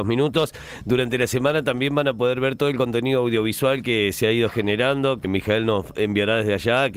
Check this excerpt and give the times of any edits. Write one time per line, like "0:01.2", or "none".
0:05.2